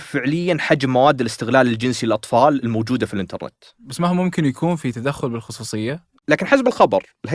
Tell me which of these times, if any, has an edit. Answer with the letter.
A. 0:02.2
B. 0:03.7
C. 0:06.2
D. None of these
C